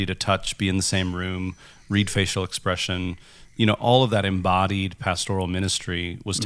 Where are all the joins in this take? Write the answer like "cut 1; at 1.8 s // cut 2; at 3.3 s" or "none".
none